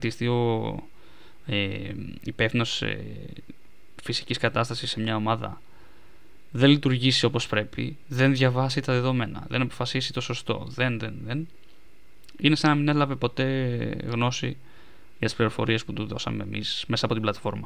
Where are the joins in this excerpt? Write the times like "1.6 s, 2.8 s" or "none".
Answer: none